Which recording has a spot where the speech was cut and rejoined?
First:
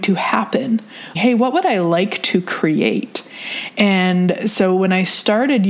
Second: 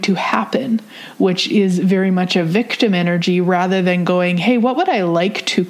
first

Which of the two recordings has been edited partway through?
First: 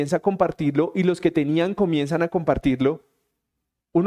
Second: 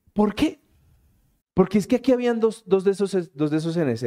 second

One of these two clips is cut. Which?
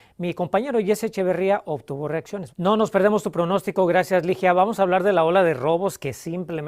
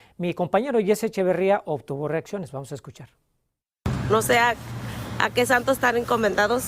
first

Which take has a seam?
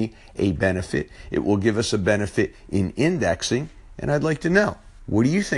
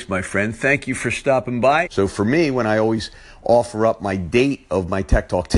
second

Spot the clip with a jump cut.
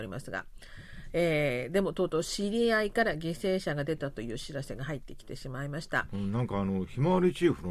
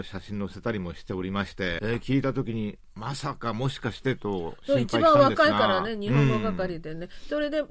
second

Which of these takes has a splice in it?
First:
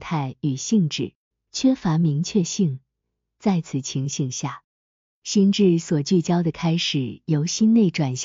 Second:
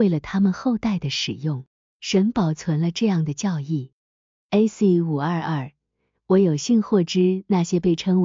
first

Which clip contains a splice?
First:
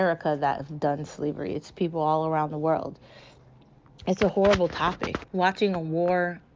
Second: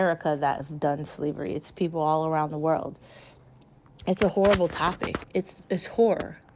first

